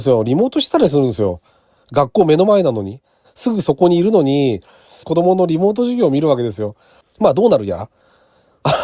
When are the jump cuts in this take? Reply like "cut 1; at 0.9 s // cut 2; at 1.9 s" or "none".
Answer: cut 1; at 3.2 s // cut 2; at 5.0 s // cut 3; at 7.0 s